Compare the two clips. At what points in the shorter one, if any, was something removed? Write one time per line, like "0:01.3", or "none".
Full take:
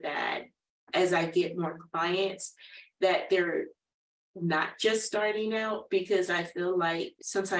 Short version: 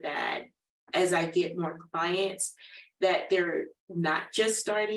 0:03.8